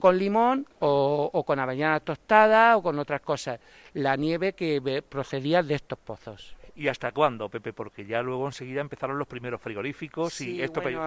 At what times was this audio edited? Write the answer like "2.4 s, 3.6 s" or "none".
none